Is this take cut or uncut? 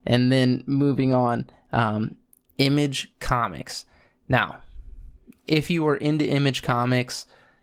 uncut